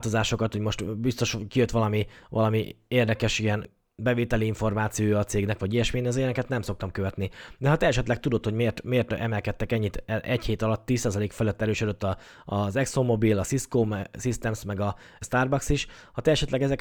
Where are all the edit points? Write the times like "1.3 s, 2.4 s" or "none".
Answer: none